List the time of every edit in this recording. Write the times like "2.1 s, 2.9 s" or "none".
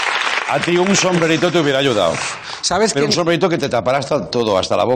none